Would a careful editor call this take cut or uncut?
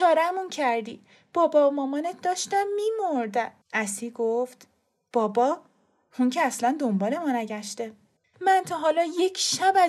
cut